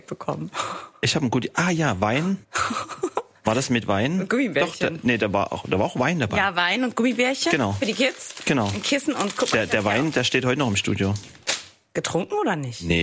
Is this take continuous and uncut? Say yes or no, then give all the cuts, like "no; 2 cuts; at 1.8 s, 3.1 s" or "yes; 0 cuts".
yes; 0 cuts